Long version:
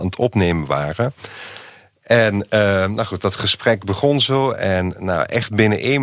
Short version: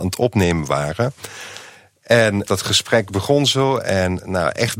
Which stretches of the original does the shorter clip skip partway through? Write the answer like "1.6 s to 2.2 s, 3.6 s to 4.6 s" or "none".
2.5 s to 3.2 s